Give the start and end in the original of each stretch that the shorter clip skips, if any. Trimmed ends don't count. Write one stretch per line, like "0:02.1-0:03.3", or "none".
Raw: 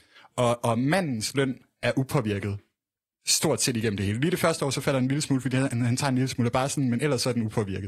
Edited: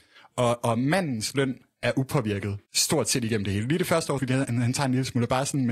0:02.7-0:03.2
0:04.7-0:05.4